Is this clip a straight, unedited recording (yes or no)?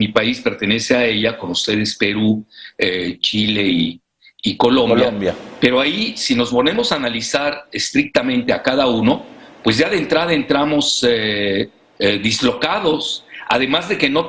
yes